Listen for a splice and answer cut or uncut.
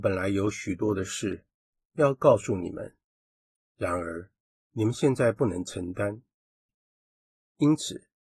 cut